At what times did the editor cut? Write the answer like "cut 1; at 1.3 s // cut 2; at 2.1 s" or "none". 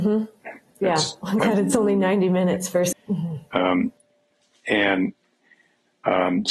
cut 1; at 2.9 s